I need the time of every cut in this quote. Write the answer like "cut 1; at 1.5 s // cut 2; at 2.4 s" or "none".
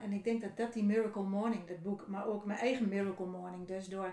none